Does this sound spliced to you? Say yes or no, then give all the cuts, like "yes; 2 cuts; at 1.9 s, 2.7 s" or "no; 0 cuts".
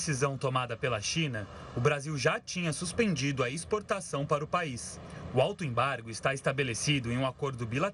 no; 0 cuts